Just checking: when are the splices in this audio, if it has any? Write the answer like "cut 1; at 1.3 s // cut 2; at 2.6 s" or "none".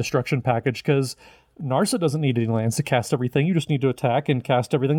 none